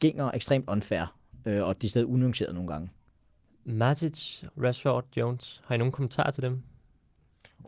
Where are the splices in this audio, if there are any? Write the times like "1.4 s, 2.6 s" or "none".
4.5 s